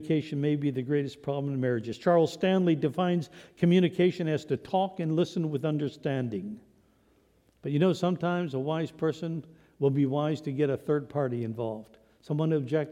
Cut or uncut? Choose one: cut